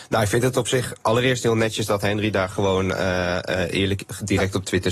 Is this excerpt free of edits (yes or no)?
yes